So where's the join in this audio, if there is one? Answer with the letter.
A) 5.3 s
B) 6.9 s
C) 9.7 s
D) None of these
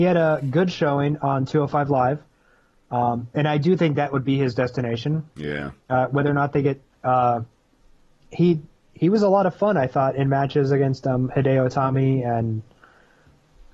B